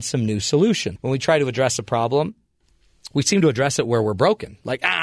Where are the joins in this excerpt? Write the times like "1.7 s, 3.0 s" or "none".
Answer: 1.0 s